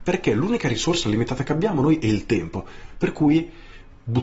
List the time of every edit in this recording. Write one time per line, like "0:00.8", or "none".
none